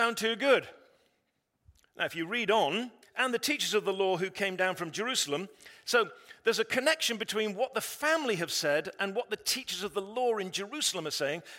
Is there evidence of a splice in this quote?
yes; 1 cut; at 3.0 s

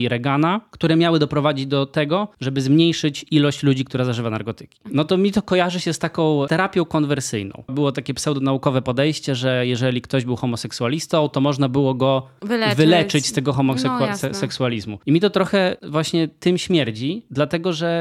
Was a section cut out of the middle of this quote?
yes; 1 cut; at 4.8 s

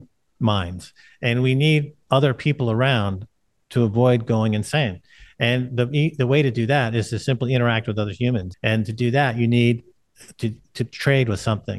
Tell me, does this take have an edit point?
yes; 1 cut; at 8.5 s

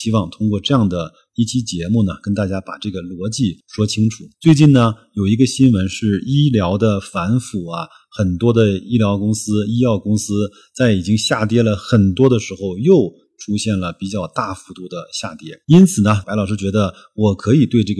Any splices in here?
yes; 2 cuts; at 4.3 s, 16.2 s

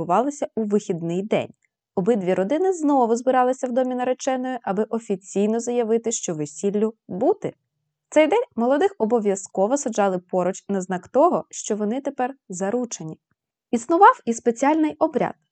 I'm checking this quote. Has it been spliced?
no; 0 cuts

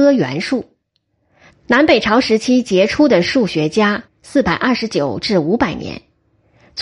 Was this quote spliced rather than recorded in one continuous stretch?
yes; 2 cuts; at 1.5 s, 4.0 s

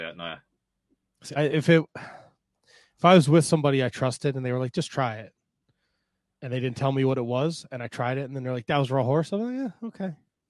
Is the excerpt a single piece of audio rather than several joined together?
no; 1 cut; at 1.4 s

